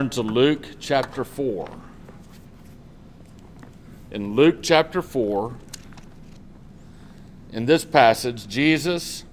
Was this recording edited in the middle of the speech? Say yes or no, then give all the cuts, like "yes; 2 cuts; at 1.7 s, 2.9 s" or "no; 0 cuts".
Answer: no; 0 cuts